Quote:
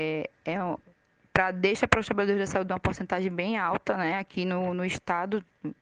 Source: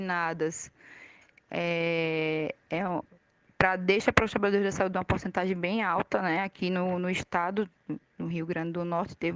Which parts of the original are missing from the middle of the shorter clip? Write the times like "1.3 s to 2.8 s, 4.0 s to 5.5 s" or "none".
none